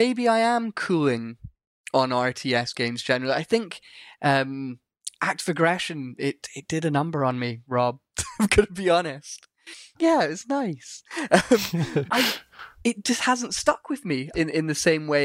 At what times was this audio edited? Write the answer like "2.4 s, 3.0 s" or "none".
9.9 s, 12.1 s, 14.3 s